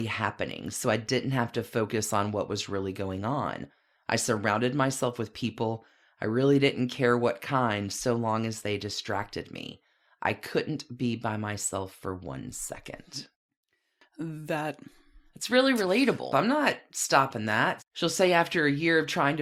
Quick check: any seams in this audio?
yes; 2 cuts; at 16.3 s, 17.8 s

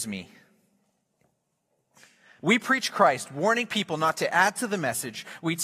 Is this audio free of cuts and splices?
no; 1 cut; at 2.4 s

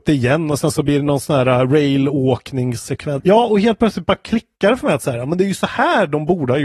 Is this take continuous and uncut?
no; 1 cut; at 3.2 s

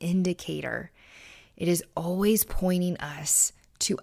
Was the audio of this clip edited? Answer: no; 0 cuts

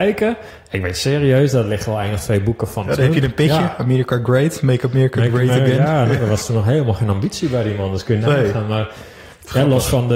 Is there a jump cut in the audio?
no; 0 cuts

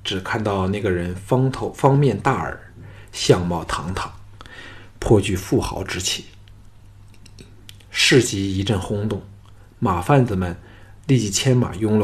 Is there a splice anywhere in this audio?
no; 0 cuts

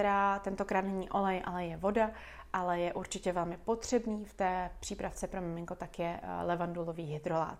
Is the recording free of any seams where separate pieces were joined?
yes; 0 cuts

